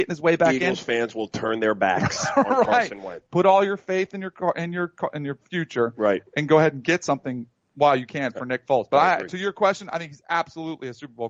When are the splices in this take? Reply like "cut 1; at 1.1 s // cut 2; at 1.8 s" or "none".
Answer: cut 1; at 3.2 s